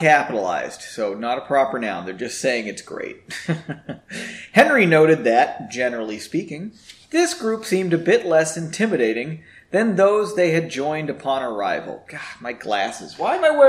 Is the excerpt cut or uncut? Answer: uncut